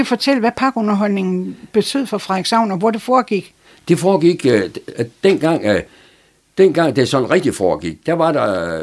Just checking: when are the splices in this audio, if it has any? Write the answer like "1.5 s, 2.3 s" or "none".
none